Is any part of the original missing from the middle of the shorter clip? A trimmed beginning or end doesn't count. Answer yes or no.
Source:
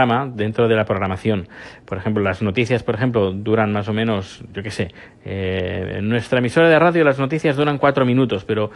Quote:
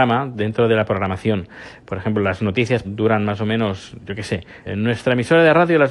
yes